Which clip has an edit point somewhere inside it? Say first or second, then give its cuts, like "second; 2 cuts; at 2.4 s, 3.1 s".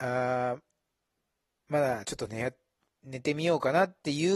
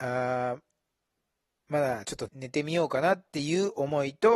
second; 1 cut; at 2.3 s